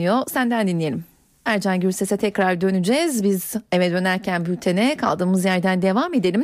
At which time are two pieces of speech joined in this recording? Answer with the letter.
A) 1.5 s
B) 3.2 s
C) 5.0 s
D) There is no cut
A